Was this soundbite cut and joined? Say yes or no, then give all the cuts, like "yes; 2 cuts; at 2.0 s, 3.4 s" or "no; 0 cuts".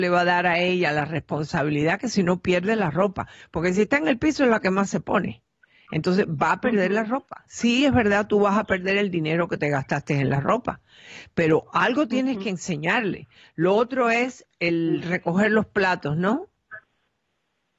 no; 0 cuts